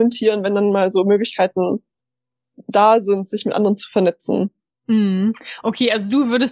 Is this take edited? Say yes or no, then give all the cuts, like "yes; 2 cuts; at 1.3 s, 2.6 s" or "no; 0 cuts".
no; 0 cuts